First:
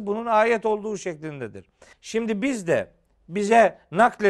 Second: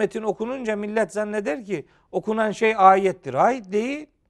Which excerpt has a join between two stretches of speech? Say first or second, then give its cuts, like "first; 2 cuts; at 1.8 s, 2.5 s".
first; 1 cut; at 1.9 s